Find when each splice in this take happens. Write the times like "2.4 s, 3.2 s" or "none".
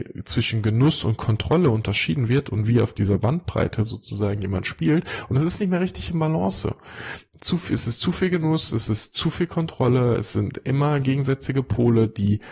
none